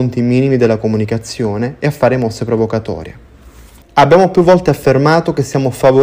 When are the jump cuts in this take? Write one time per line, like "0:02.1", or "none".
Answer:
0:03.8